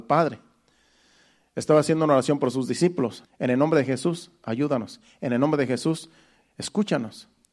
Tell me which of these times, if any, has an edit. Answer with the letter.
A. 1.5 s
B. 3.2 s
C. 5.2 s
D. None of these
B